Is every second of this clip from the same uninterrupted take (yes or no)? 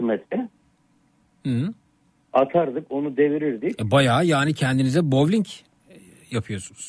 no